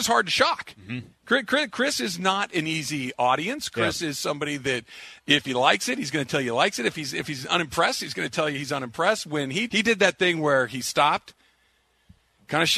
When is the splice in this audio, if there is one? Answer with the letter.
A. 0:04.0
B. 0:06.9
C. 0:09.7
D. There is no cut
C